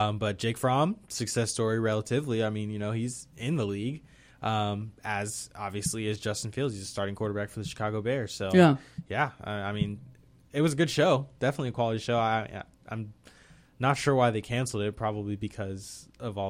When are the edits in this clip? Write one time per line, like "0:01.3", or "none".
none